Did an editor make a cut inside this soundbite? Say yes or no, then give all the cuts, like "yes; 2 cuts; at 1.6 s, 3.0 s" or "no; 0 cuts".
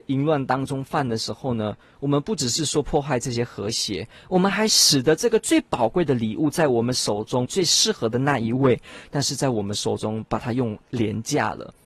yes; 1 cut; at 7.4 s